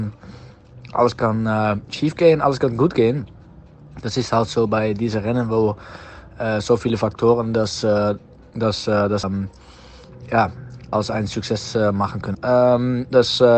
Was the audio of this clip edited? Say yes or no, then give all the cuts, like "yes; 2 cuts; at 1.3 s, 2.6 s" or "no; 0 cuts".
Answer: yes; 3 cuts; at 9.2 s, 10.9 s, 12.3 s